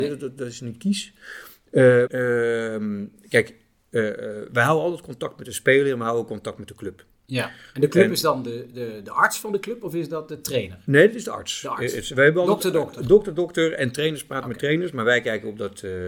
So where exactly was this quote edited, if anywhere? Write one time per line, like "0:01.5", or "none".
0:02.1